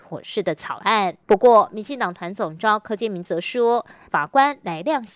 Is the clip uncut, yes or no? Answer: no